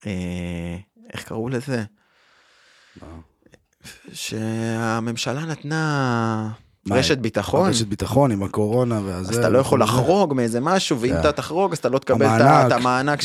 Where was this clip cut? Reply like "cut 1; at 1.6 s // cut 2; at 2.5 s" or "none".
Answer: none

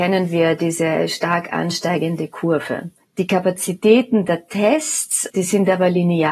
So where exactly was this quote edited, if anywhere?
cut 1; at 5.3 s

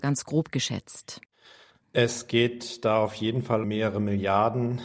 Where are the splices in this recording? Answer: cut 1; at 3.6 s

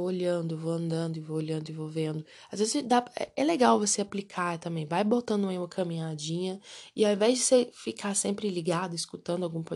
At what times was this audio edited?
none

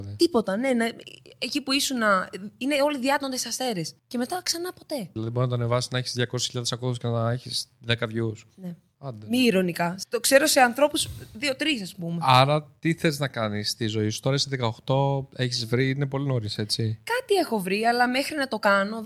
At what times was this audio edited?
none

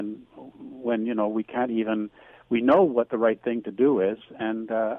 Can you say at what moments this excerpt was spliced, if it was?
none

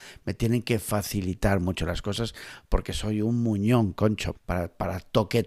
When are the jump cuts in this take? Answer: cut 1; at 4.4 s

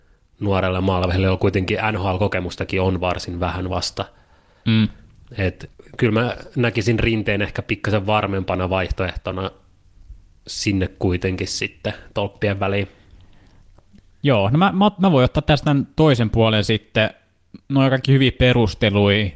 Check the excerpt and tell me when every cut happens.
none

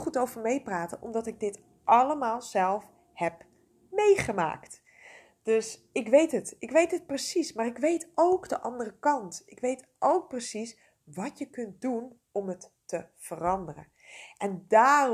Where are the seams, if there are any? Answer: none

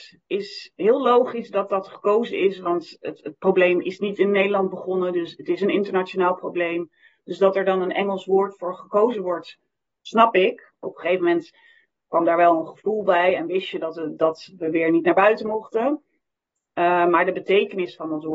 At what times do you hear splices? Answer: cut 1; at 10.8 s

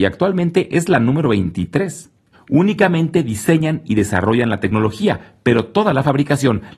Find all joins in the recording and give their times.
cut 1; at 2.3 s

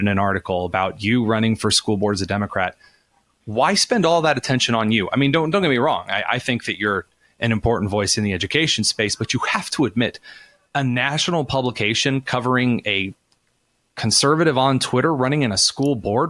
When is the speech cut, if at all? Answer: none

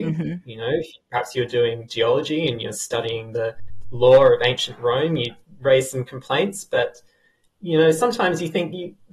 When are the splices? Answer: none

